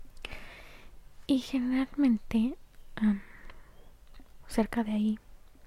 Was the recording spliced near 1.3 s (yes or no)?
no